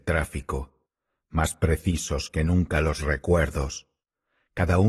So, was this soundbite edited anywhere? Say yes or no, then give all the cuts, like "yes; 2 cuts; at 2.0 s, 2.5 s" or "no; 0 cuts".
no; 0 cuts